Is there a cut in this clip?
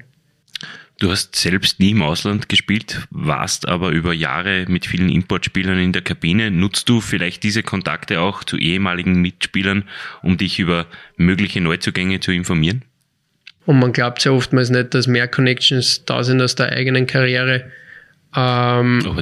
yes; 1 cut; at 13.6 s

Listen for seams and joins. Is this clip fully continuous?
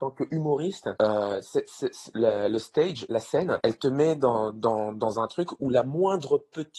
yes; 0 cuts

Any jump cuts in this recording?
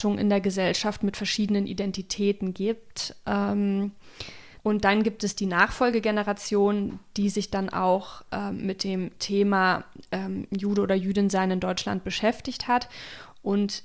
yes; 1 cut; at 4.6 s

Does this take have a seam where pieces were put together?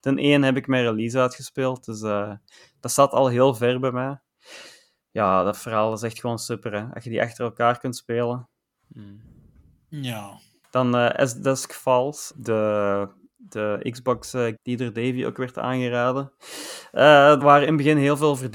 yes; 3 cuts; at 12.3 s, 14.6 s, 17.4 s

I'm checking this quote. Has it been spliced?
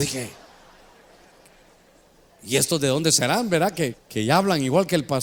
yes; 1 cut; at 3.9 s

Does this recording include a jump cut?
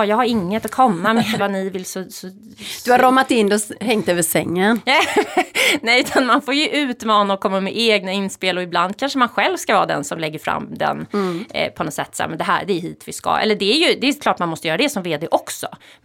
yes; 1 cut; at 1.4 s

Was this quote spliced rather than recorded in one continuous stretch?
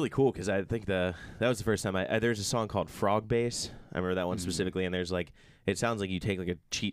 no; 0 cuts

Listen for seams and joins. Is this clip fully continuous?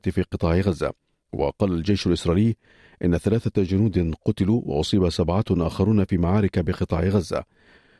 yes; 0 cuts

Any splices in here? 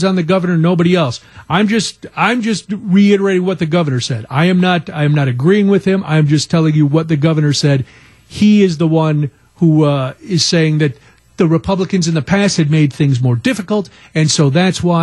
no; 0 cuts

